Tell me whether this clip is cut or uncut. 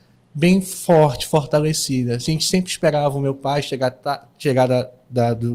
uncut